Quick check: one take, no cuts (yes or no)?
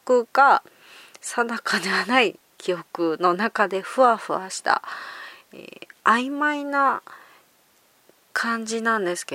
yes